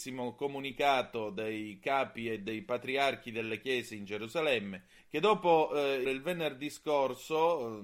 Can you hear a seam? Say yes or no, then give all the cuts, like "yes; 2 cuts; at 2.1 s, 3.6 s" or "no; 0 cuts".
yes; 2 cuts; at 5.0 s, 6.0 s